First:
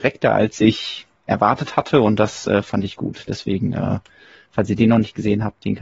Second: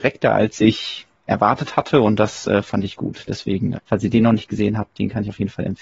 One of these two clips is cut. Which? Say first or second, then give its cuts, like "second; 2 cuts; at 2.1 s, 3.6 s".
second; 1 cut; at 3.7 s